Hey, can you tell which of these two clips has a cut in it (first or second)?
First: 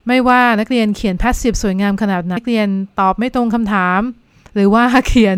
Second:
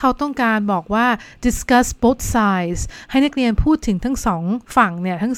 first